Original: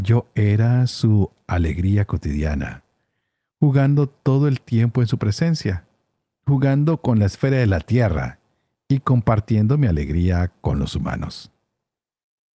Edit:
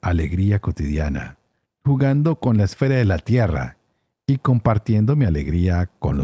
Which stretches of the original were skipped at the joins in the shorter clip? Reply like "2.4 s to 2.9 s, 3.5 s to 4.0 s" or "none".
3.1 s to 6.3 s